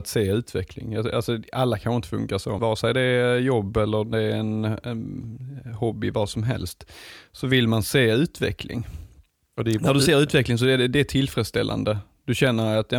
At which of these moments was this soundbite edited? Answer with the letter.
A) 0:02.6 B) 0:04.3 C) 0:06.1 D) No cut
A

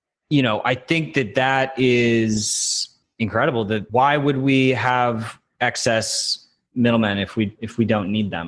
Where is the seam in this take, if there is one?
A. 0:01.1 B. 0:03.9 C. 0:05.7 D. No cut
B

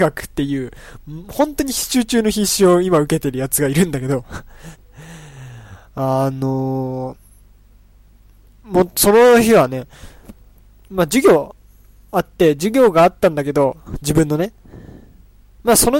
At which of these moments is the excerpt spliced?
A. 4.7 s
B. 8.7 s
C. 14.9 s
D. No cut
A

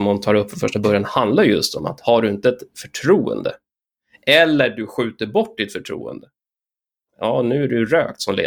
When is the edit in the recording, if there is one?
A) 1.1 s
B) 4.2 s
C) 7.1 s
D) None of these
D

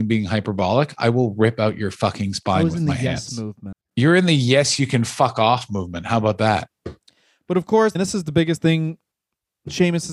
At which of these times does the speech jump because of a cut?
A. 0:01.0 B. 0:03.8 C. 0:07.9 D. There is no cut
C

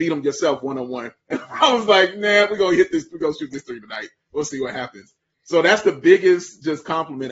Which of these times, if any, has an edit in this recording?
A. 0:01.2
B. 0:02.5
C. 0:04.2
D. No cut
D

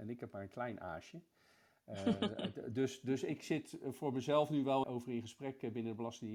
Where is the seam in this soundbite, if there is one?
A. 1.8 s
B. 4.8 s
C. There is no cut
B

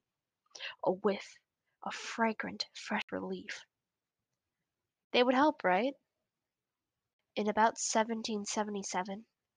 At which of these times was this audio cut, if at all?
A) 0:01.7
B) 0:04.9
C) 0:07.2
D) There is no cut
B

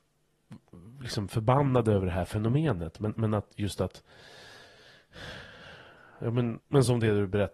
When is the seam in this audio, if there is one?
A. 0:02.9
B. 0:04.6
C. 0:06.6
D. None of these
C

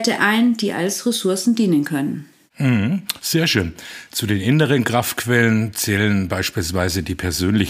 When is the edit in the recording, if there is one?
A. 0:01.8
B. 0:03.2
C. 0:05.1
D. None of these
D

